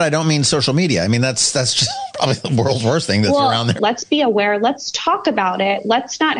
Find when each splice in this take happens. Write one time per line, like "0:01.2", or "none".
0:03.8